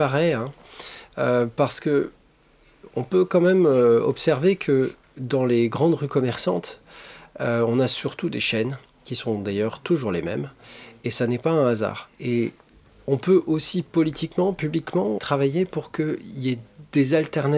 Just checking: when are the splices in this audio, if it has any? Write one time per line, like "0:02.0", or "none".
0:12.1
0:15.2